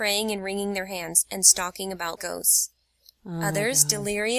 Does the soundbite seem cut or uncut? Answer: cut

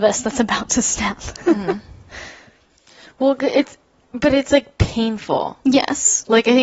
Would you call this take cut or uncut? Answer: uncut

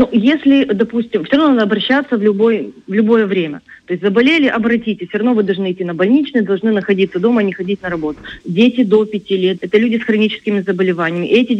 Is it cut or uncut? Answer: cut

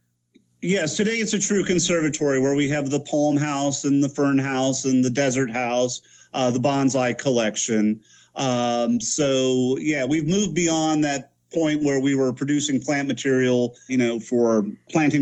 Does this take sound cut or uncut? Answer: cut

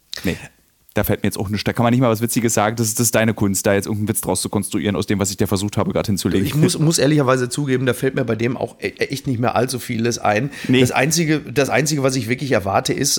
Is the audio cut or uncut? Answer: uncut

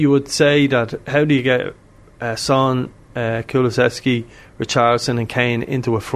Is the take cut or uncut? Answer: uncut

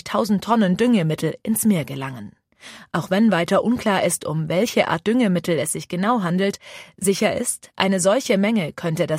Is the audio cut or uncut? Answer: uncut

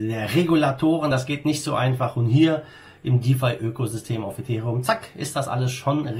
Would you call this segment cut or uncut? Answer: uncut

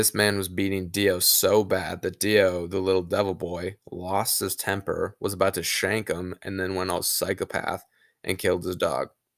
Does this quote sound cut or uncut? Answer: uncut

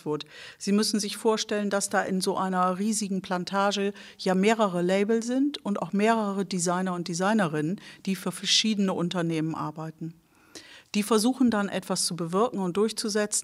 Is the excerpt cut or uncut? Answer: uncut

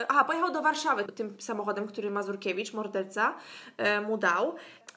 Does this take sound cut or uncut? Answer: cut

